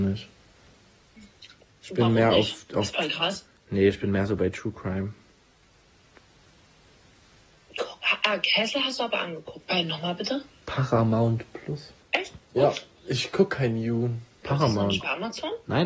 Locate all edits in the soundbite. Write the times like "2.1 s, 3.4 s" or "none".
9.6 s, 12.0 s, 14.4 s

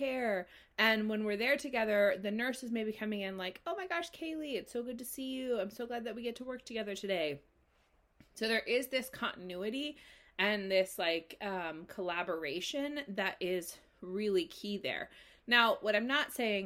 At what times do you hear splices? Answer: none

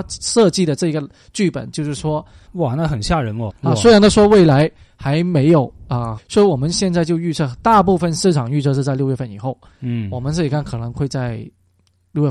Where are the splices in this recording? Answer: 2.5 s, 3.5 s, 6.2 s

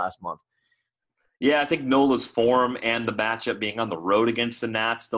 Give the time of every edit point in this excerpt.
none

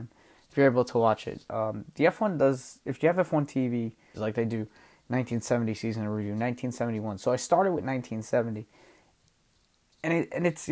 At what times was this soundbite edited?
4.1 s

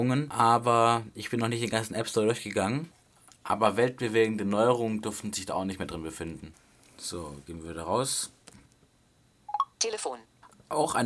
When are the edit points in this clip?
9.7 s

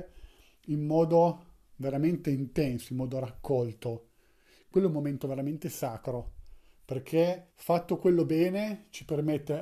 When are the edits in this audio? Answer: 7.5 s

